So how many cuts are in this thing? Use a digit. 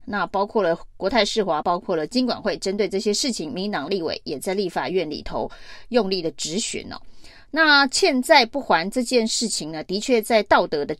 1